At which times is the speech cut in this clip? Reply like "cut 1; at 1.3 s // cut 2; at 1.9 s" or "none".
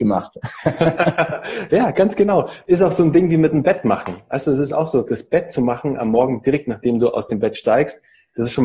none